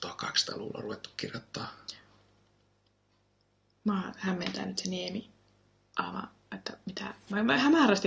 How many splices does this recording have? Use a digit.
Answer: 0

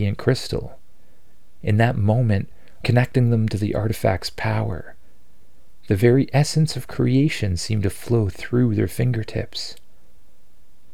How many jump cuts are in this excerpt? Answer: 1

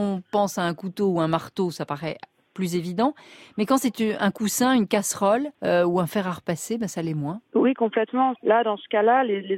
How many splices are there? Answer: 2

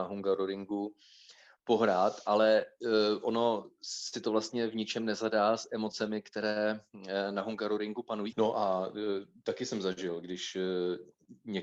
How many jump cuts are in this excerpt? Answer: 1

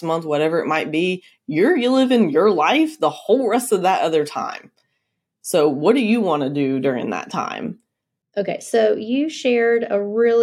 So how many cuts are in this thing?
0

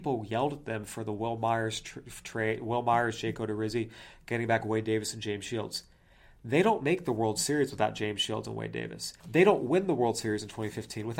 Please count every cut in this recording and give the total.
1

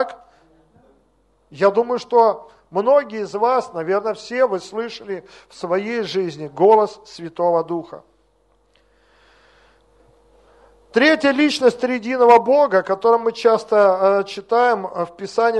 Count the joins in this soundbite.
0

